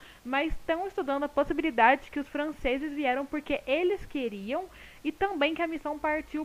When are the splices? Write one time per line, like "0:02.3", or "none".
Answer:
none